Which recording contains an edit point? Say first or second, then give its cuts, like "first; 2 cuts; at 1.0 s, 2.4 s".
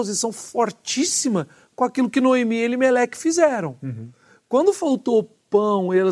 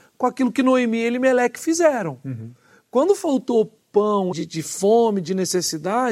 second; 1 cut; at 4.3 s